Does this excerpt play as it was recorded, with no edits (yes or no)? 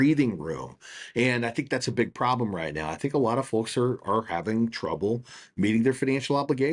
yes